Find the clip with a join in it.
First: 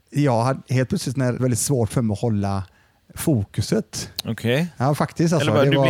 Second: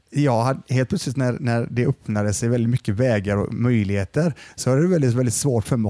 first; 1 cut; at 1.4 s

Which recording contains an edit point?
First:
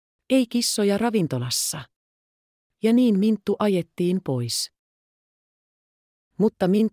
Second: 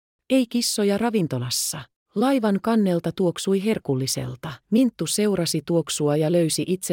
second; 2 cuts; at 2.1 s, 4.6 s

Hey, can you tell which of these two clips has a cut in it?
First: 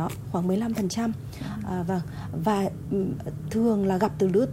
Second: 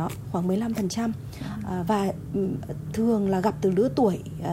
second; 1 cut; at 1.9 s

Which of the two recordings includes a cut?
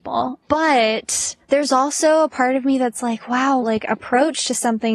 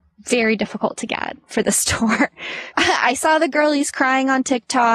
first; 1 cut; at 3.6 s

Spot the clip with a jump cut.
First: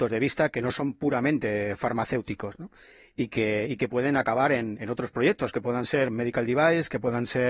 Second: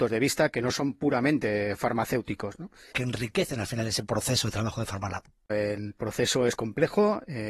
second; 2 cuts; at 2.9 s, 5.5 s

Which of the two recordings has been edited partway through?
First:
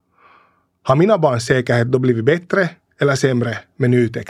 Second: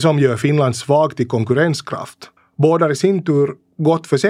second; 1 cut; at 2.4 s

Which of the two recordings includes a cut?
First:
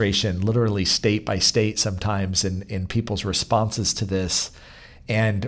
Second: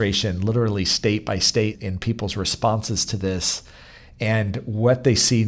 second; 1 cut; at 1.8 s

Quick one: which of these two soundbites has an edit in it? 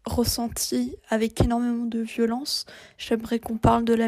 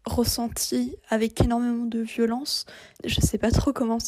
second; 1 cut; at 3.0 s

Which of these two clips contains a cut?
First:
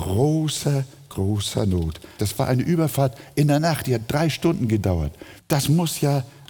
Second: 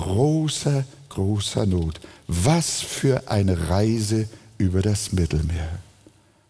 first; 2 cuts; at 2.2 s, 5.4 s

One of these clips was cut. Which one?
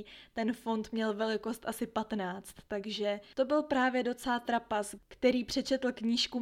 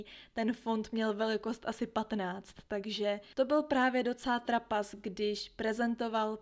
first; 1 cut; at 5.0 s

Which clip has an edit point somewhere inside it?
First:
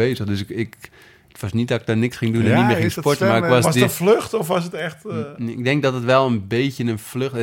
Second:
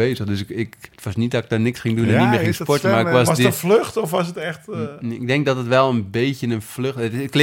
second; 1 cut; at 0.9 s

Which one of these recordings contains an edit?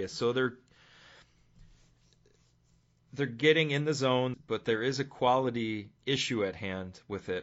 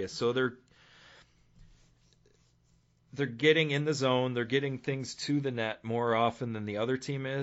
first; 2 cuts; at 4.3 s, 6.0 s

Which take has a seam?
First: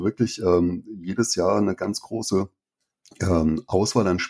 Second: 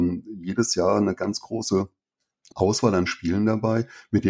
second; 1 cut; at 2.5 s

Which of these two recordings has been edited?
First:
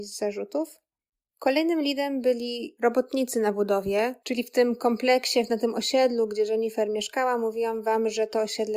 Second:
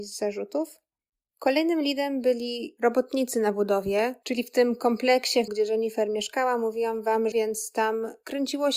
second; 2 cuts; at 5.5 s, 7.3 s

